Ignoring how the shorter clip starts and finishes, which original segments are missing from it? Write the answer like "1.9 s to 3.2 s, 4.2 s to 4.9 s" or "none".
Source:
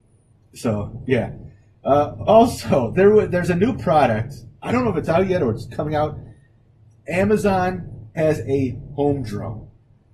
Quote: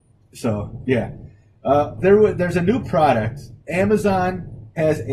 2.2 s to 2.9 s, 4.6 s to 7.0 s

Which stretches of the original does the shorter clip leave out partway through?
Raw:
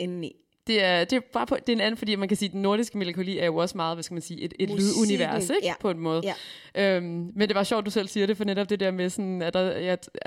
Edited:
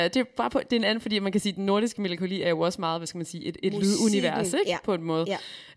none

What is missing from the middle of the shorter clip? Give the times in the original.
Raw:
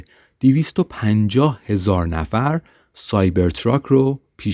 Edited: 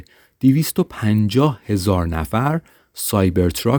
none

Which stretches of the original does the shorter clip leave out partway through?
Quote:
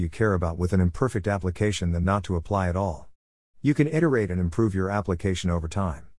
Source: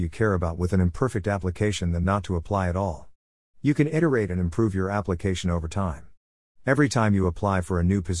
none

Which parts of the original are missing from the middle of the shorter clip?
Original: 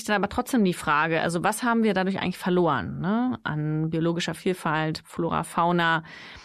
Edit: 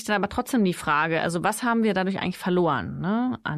none

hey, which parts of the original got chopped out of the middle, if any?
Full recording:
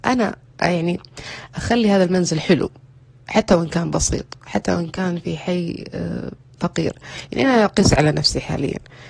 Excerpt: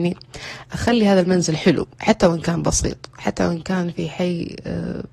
2.8 s to 3.2 s

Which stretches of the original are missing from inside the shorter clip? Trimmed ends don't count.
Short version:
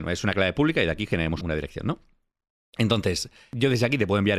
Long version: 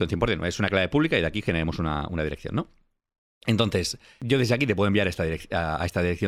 1.8 s to 2.1 s

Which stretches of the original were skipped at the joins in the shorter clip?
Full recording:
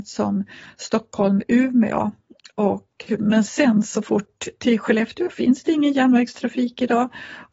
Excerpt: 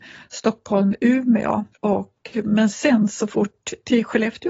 2.2 s to 2.5 s

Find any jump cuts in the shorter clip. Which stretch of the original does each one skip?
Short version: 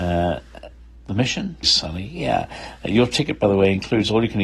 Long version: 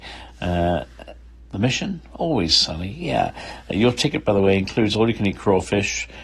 2.1 s to 2.5 s

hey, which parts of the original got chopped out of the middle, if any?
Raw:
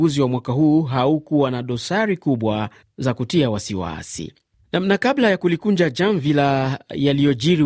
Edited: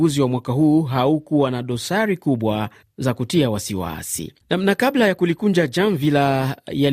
4.4 s to 4.6 s

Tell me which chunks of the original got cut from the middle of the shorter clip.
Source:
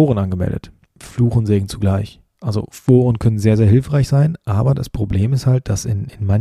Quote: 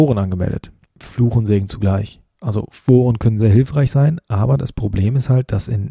3.4 s to 3.6 s

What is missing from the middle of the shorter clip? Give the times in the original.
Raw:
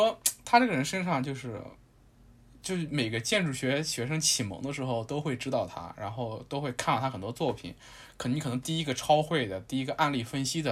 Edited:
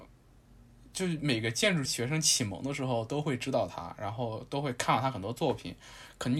3.5 s to 3.8 s

